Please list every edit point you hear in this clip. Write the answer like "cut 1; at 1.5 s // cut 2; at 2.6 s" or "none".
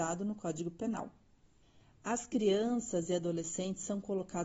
none